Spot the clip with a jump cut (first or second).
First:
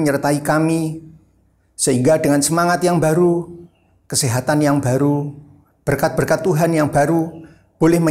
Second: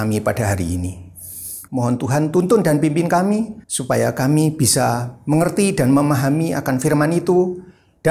second